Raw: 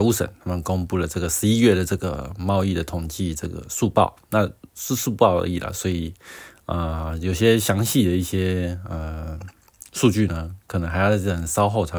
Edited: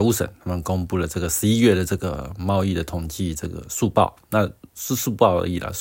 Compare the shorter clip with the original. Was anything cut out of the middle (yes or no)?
no